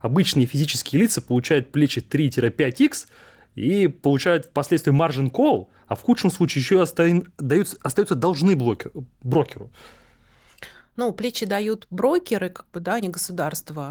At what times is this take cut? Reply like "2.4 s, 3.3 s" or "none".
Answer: none